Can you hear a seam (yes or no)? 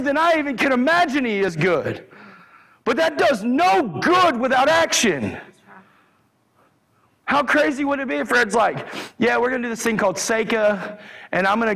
no